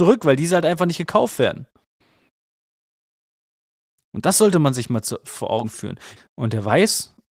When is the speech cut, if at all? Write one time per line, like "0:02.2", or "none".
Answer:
0:06.2